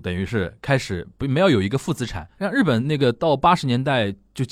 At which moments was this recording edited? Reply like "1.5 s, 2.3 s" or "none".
none

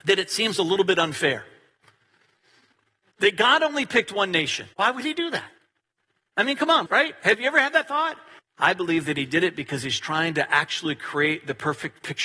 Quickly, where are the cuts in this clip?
4.7 s, 6.9 s, 8.4 s

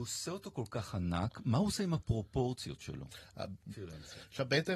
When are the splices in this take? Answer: 3.7 s

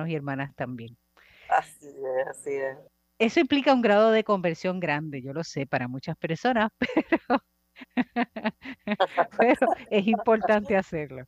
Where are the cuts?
none

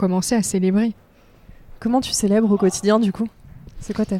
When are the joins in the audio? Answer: none

